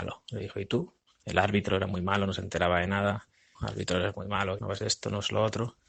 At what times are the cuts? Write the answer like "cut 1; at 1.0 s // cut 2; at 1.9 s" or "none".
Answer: cut 1; at 1.2 s // cut 2; at 3.5 s // cut 3; at 4.6 s

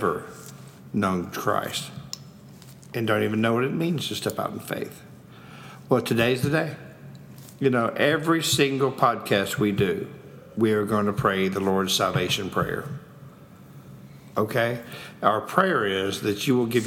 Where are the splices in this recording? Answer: cut 1; at 14.3 s

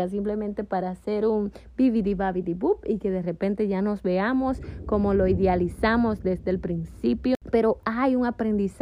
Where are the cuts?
none

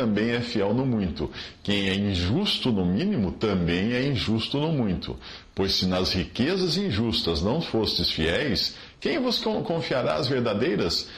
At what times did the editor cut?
none

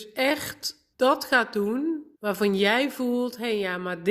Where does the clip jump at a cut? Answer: cut 1; at 0.9 s // cut 2; at 2.1 s

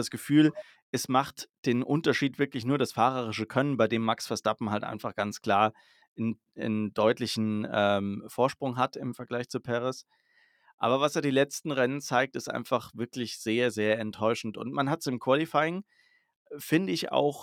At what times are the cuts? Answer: none

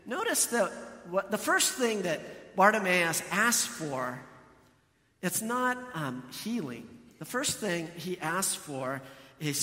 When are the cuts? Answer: none

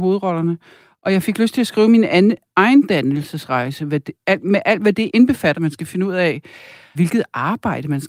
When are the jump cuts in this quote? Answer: cut 1; at 5.5 s // cut 2; at 7.0 s

